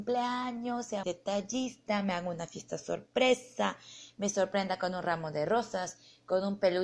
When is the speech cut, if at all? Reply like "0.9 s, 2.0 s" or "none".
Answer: 1.0 s